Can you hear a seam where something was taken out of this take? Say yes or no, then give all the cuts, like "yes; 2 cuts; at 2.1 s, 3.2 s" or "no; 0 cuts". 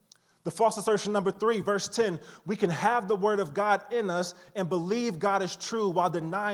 no; 0 cuts